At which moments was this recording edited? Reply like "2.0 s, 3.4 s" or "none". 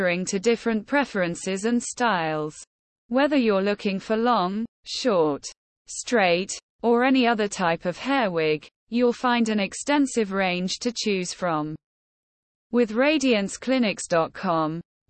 5.8 s